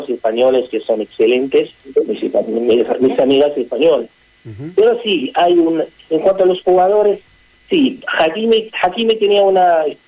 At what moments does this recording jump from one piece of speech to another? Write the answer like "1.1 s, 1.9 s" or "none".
none